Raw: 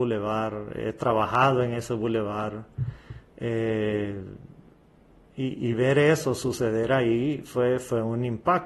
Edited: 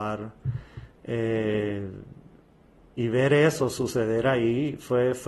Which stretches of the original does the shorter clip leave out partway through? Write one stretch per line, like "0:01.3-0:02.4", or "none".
0:05.3-0:05.6